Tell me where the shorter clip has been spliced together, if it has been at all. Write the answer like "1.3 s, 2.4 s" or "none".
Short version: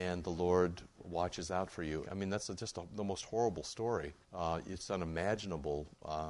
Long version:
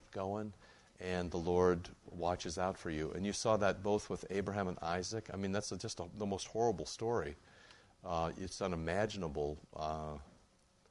2.0 s, 4.2 s